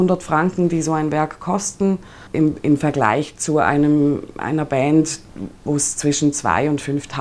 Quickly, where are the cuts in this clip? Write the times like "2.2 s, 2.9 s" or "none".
2.3 s